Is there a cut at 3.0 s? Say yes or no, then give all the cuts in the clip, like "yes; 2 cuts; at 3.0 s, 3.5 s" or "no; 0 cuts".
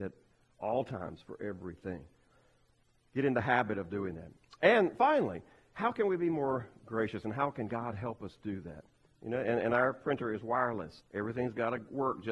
no; 2 cuts; at 9.1 s, 11.0 s